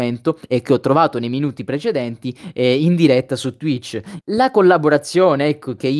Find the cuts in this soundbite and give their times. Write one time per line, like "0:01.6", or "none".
0:04.2